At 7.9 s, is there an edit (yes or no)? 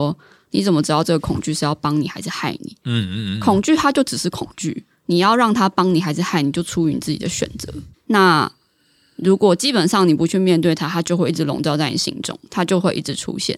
yes